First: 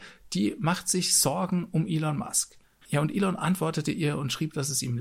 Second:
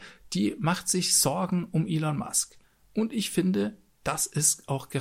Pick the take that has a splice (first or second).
first